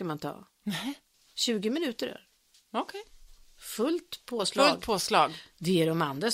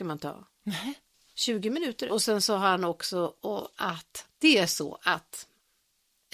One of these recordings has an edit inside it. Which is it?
second; 2 cuts; at 2.1 s, 4.3 s

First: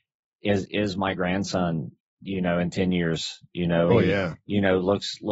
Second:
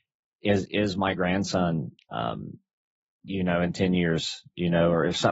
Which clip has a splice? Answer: first; 2 cuts; at 2.0 s, 3.9 s

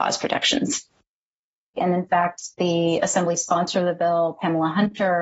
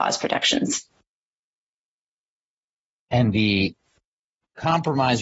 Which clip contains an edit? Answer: first; 1 cut; at 1.8 s

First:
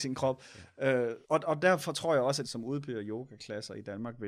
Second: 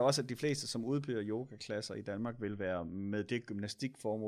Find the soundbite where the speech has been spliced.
first; 2 cuts; at 1.2 s, 2.4 s

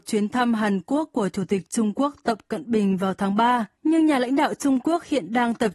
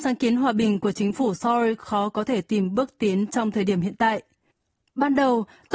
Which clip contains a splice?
first; 1 cut; at 3.7 s

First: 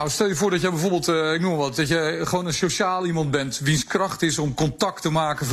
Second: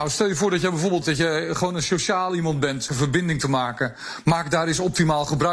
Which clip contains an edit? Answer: second; 2 cuts; at 1.0 s, 2.9 s

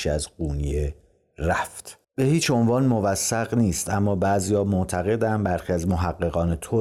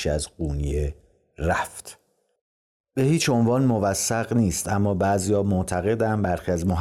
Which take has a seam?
first; 1 cut; at 2.0 s

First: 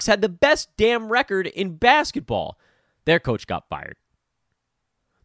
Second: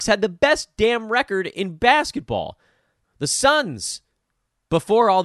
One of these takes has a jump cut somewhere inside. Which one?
second; 1 cut; at 3.0 s

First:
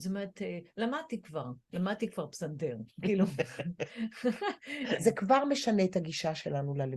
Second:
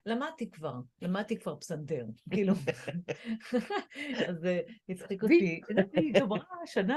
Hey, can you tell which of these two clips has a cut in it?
first; 1 cut; at 5.0 s

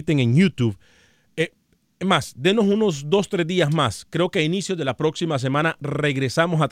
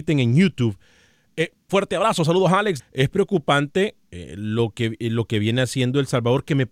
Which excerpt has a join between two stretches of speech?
second; 2 cuts; at 1.7 s, 2.8 s

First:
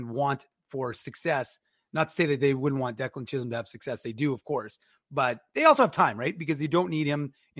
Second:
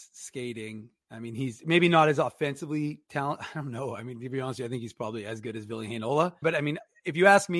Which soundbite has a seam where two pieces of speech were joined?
second; 1 cut; at 6.4 s

